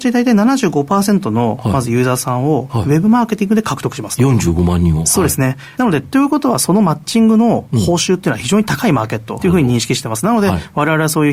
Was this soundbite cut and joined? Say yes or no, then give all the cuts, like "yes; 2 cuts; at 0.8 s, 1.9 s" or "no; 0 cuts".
yes; 2 cuts; at 5.7 s, 9.4 s